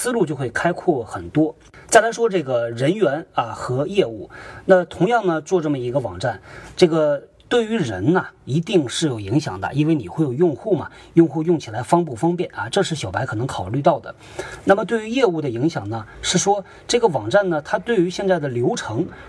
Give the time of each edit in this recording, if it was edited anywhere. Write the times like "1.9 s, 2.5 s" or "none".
none